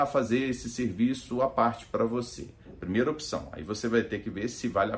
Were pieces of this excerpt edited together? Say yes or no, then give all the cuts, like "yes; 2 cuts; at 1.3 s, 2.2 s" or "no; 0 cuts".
no; 0 cuts